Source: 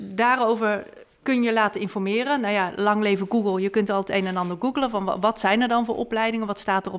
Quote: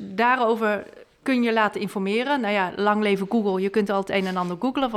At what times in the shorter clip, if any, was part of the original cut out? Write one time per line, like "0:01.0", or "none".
none